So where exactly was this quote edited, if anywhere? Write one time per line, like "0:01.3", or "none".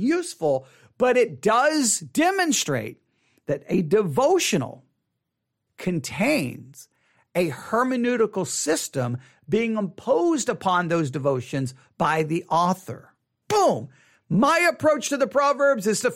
0:05.7
0:13.4